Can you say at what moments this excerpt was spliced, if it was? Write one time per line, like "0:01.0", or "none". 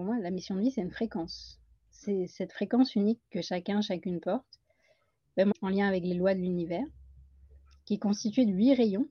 0:05.5